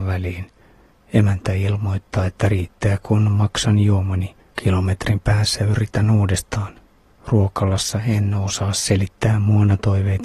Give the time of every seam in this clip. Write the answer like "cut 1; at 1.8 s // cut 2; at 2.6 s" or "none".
cut 1; at 4.5 s // cut 2; at 7.1 s